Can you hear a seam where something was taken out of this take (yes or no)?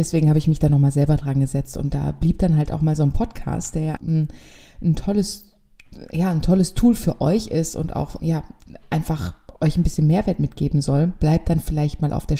yes